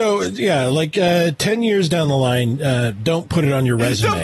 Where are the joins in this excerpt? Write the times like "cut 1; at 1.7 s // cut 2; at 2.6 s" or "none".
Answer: none